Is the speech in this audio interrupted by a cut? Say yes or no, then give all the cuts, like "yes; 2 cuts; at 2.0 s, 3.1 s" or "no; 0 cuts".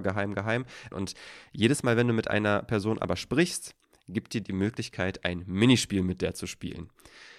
yes; 2 cuts; at 0.9 s, 4.4 s